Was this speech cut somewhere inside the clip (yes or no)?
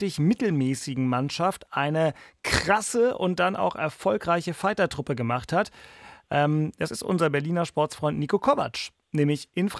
no